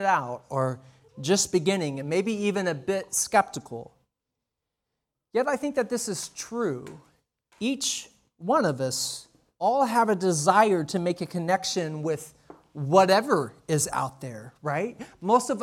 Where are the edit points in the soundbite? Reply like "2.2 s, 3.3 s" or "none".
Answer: none